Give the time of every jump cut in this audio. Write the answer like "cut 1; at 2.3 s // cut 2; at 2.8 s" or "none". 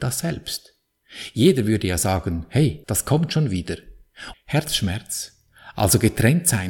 cut 1; at 2.8 s // cut 2; at 4.3 s

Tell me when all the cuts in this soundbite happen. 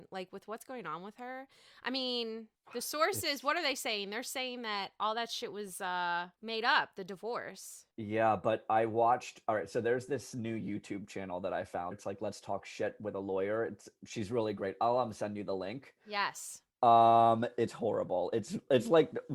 cut 1; at 11.9 s

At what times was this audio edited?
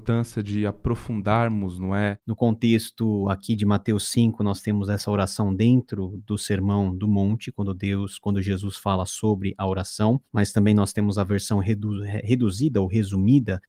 cut 1; at 2.2 s

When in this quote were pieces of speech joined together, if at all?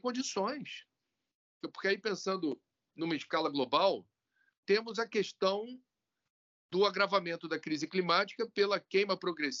cut 1; at 1.6 s // cut 2; at 4.6 s

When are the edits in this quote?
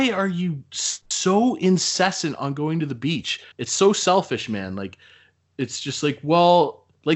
cut 1; at 3.5 s

